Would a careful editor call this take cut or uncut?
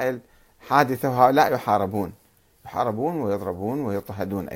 uncut